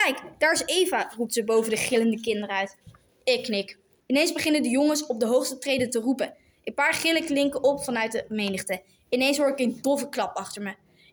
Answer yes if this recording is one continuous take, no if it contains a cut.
no